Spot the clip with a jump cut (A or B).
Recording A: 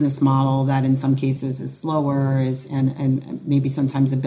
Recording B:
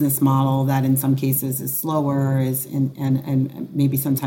A